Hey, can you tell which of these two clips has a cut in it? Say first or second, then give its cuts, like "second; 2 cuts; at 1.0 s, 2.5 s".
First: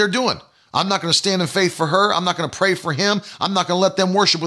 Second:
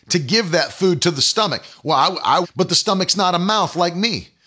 second; 1 cut; at 2.4 s